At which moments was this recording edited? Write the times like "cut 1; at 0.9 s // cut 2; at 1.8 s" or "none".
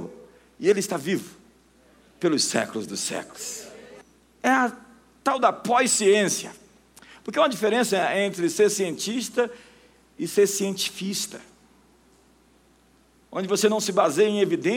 none